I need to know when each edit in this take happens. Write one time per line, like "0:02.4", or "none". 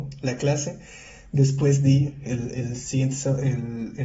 none